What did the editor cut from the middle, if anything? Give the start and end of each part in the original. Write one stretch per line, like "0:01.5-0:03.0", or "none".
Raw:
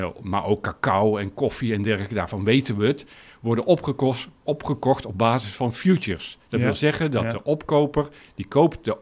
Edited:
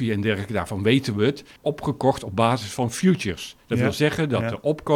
0:03.2-0:04.4